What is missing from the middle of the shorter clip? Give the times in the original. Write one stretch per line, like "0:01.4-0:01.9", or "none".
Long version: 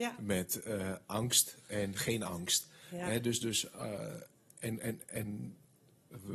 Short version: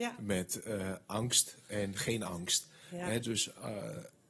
0:03.2-0:03.4